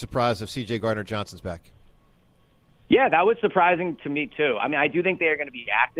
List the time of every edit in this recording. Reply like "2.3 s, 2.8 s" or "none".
none